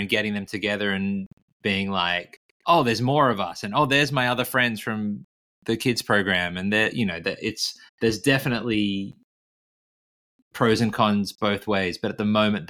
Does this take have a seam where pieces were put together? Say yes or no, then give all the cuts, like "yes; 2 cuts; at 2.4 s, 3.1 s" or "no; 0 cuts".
yes; 1 cut; at 7.9 s